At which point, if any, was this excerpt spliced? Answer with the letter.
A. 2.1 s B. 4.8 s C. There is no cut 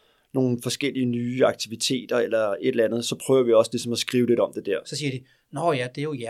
B